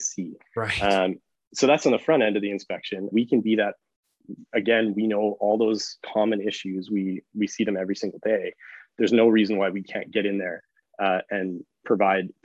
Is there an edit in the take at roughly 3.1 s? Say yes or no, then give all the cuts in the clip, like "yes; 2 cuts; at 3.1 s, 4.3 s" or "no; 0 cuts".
yes; 1 cut; at 3.1 s